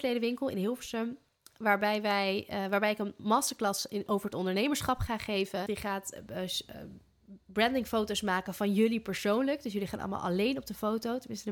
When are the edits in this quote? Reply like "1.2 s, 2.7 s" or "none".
4.1 s, 5.7 s